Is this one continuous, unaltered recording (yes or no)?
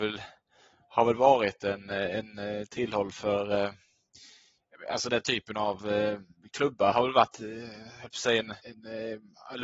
no